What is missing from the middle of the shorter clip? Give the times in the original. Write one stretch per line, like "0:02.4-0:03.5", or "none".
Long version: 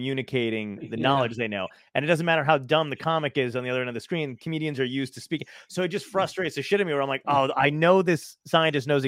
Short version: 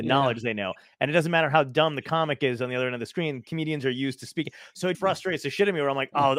0:05.9-0:06.1